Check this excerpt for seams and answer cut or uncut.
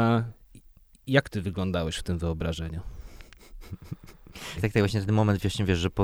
cut